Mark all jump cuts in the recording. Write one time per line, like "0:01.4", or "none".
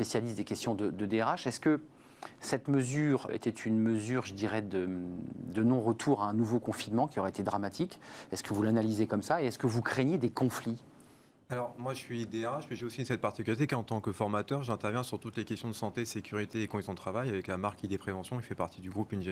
0:03.3

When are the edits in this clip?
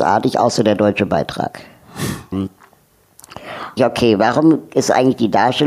0:02.3
0:03.8

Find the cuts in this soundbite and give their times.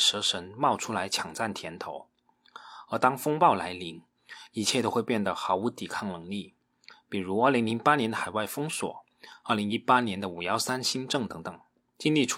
none

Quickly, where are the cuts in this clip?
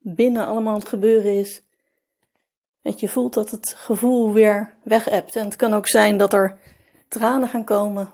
0:02.8

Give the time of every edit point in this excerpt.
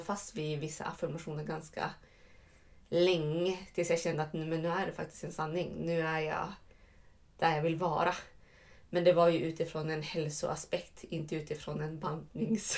none

